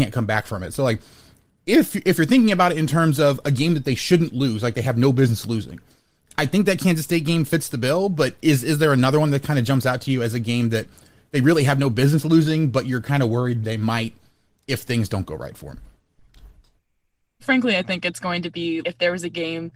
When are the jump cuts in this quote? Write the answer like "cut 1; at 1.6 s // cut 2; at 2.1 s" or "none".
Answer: cut 1; at 17.4 s // cut 2; at 18.8 s